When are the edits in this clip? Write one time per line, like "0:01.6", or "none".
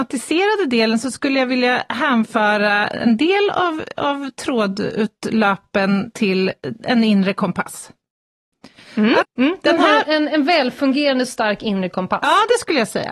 0:09.2